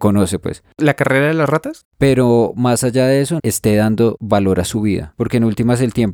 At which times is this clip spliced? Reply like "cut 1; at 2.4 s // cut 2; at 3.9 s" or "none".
cut 1; at 1.8 s // cut 2; at 3.4 s // cut 3; at 5.1 s